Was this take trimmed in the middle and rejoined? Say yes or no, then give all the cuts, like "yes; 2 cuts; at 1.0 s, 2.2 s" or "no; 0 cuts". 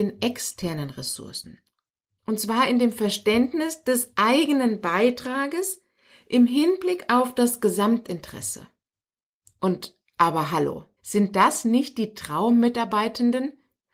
yes; 2 cuts; at 2.2 s, 11.0 s